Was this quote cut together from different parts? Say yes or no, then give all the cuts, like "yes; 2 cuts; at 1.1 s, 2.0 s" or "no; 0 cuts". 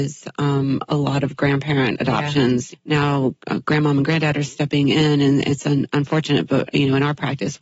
yes; 2 cuts; at 2.7 s, 6.7 s